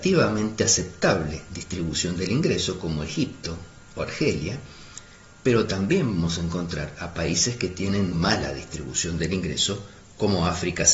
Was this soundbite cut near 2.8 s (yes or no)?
no